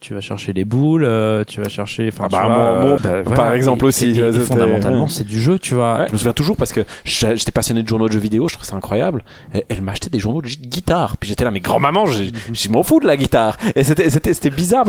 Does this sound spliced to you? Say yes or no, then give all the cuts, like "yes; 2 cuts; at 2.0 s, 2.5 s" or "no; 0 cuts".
yes; 2 cuts; at 3.0 s, 6.1 s